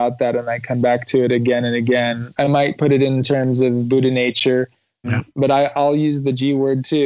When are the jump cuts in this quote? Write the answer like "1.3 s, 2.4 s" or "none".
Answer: 2.4 s, 5.0 s